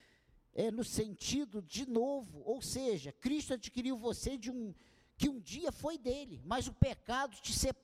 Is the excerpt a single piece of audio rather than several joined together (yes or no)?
yes